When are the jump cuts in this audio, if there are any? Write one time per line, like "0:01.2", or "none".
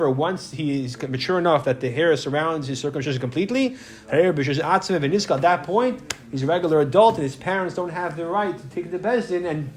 none